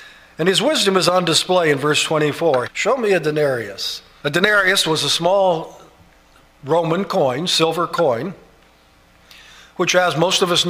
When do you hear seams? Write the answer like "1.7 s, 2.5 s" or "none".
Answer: 2.6 s, 4.2 s